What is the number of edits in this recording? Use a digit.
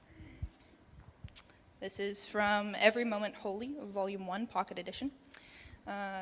0